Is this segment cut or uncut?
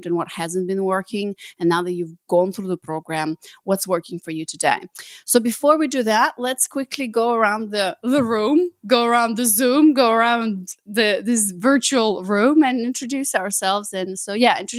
uncut